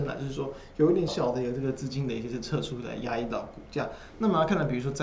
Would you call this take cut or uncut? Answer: cut